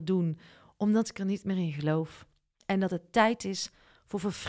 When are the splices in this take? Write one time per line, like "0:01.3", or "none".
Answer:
none

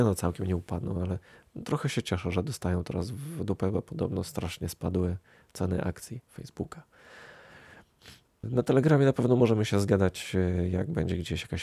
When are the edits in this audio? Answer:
0:08.4

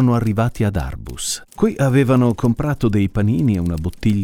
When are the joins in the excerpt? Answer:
0:01.5

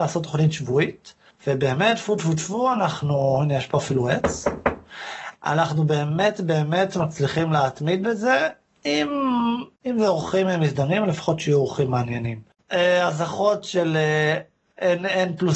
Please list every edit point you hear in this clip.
0:09.7
0:12.6

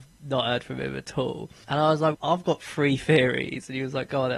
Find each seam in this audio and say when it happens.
0:02.1

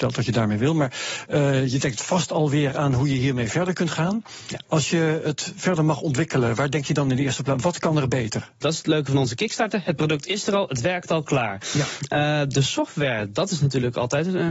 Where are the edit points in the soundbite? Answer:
0:08.6

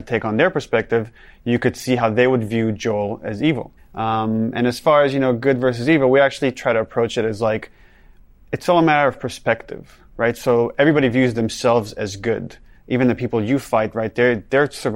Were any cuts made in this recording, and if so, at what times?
0:03.8

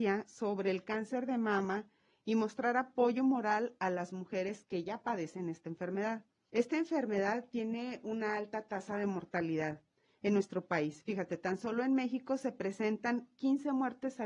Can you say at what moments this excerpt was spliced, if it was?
0:06.5

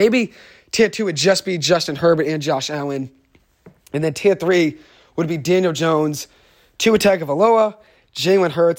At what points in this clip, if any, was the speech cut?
none

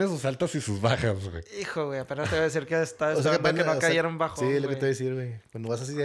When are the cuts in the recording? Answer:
none

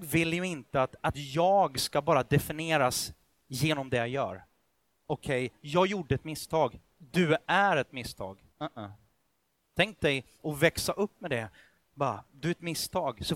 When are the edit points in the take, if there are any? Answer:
0:08.5

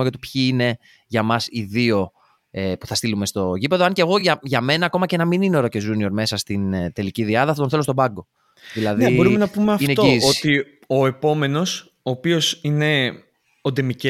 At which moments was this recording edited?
none

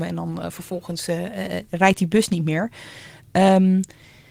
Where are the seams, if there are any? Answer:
none

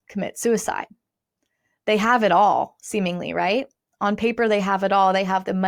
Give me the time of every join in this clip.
none

